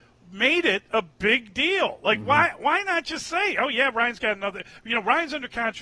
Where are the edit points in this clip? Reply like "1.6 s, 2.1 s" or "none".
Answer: none